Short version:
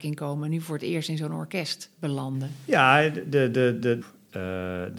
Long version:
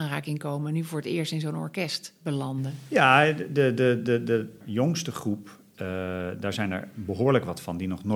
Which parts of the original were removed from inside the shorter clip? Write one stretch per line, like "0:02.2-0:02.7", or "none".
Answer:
0:04.2-0:05.4